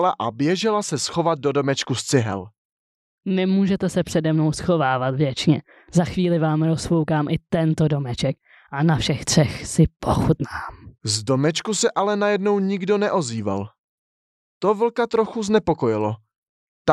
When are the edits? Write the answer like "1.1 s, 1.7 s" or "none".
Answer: 3.2 s